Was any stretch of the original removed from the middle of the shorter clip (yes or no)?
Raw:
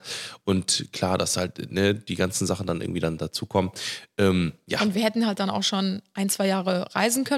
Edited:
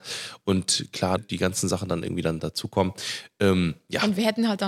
yes